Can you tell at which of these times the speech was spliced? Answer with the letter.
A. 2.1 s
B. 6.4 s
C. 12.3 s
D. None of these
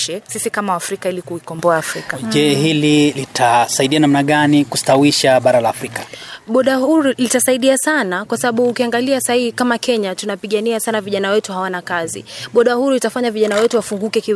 A